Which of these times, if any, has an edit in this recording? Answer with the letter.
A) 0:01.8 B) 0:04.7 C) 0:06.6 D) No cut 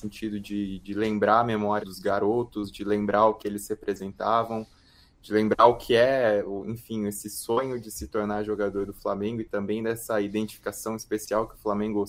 A